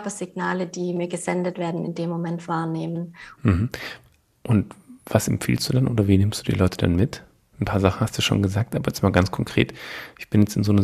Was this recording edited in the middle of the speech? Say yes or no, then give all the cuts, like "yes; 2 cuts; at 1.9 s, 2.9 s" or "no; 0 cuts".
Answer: yes; 1 cut; at 3.3 s